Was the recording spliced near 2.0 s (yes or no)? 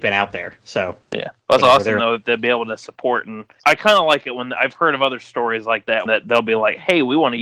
no